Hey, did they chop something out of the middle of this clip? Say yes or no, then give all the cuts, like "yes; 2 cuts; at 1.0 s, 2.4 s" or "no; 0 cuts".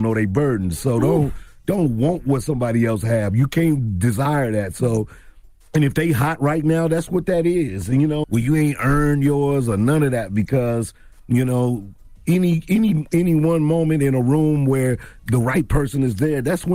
yes; 1 cut; at 8.2 s